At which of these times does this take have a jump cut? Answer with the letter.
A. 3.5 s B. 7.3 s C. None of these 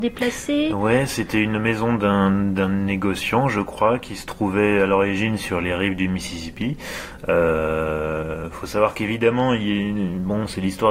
C